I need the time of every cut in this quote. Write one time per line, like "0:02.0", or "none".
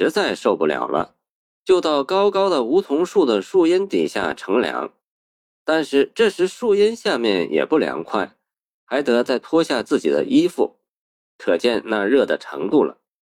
none